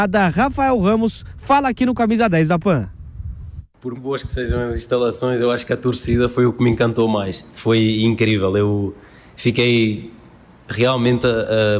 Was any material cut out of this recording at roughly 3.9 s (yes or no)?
yes